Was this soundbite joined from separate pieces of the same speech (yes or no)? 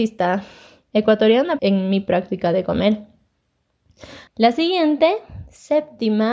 yes